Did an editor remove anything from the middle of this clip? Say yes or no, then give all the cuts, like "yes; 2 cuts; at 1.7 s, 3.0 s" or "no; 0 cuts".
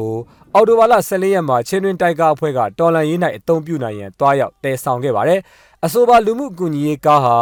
no; 0 cuts